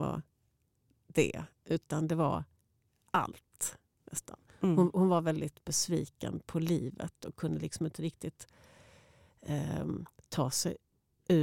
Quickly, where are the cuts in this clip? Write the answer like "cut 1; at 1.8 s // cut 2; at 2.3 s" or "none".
none